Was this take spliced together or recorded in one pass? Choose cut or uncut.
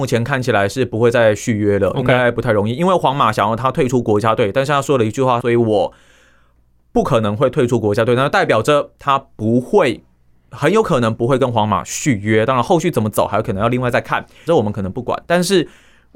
cut